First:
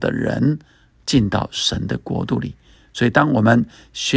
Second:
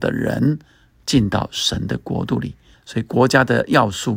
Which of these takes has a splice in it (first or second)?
second